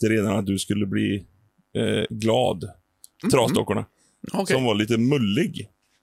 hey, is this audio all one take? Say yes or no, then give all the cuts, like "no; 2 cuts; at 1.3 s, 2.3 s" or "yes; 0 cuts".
no; 2 cuts; at 3.2 s, 4.3 s